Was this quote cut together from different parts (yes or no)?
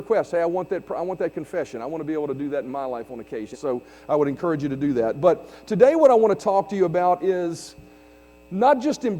yes